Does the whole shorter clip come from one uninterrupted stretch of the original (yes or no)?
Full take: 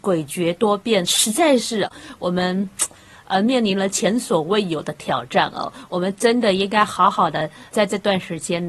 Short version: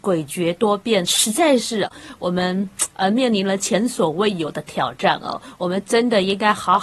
no